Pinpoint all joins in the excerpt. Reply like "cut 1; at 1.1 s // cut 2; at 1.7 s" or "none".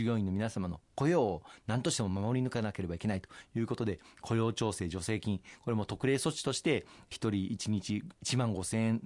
none